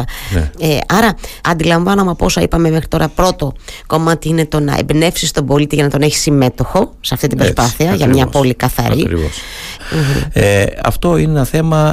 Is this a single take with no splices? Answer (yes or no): no